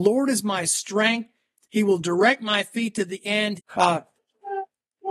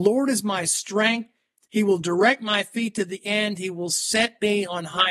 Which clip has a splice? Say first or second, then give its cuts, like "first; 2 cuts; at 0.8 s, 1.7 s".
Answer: first; 1 cut; at 3.6 s